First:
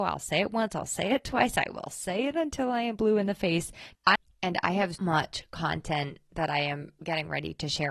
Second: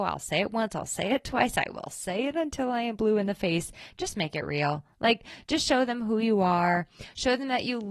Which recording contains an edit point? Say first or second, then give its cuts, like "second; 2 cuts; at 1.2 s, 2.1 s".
first; 2 cuts; at 3.9 s, 5.0 s